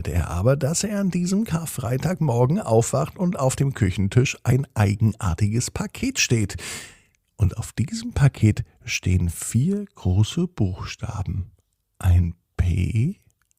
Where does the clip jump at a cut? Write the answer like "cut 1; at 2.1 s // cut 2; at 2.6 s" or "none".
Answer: none